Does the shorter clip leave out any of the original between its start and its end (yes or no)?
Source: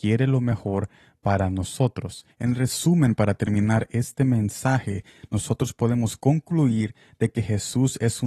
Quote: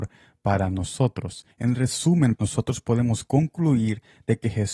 yes